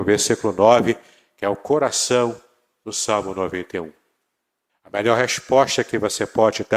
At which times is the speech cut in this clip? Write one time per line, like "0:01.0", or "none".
0:04.7